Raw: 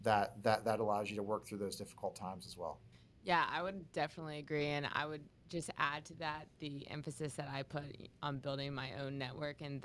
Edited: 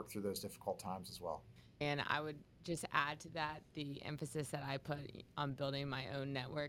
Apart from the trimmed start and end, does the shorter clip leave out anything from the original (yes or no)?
yes